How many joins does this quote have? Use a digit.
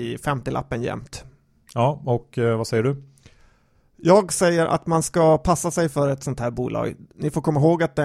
0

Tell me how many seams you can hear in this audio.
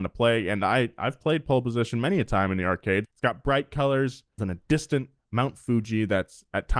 2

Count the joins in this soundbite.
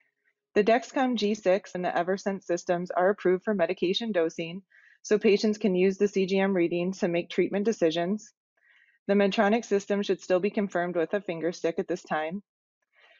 1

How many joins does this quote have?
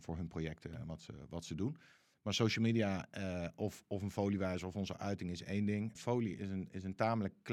2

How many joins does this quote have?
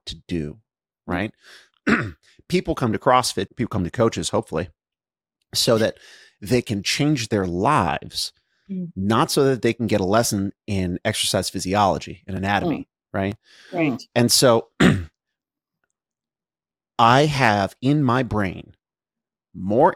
1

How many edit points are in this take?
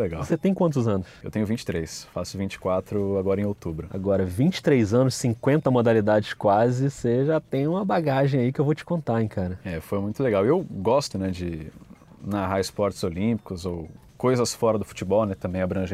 1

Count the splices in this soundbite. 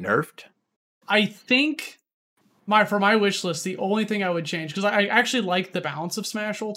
1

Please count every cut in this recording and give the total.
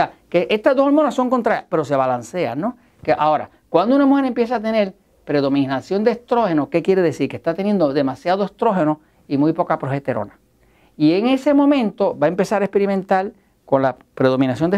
0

